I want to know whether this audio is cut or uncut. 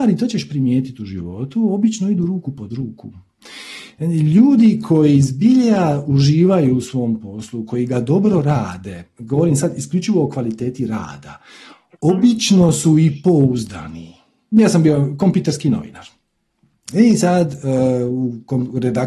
cut